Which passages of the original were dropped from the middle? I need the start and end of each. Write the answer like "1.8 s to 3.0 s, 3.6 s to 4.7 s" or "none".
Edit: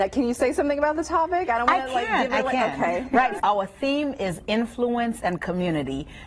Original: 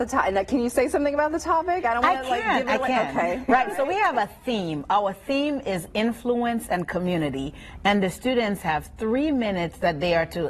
3.7 s to 4.9 s

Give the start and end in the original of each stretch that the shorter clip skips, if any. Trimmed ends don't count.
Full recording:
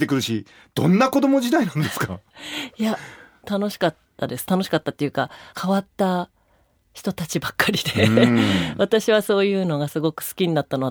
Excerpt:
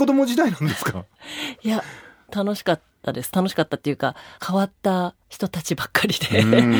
6.4 s to 6.9 s

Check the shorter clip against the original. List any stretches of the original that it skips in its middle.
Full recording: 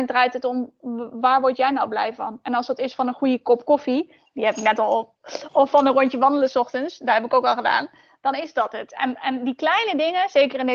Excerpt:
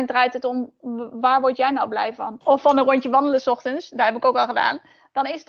2.4 s to 5.5 s

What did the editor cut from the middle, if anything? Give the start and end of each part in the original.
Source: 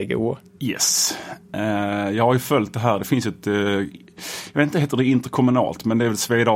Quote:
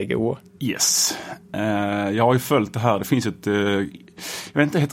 none

